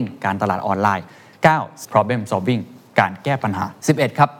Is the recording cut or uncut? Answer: cut